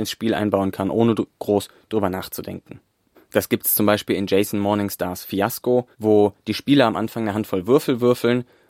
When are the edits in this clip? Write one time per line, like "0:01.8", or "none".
0:03.1
0:05.9